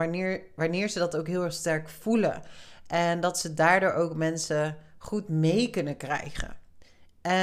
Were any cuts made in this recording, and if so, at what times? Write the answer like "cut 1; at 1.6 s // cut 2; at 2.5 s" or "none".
none